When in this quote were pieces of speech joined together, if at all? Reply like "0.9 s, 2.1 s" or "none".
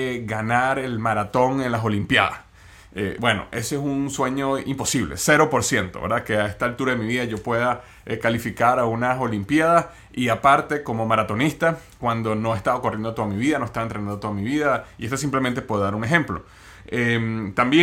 none